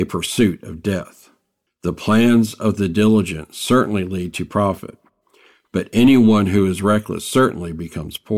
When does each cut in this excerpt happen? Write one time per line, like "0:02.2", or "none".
0:01.7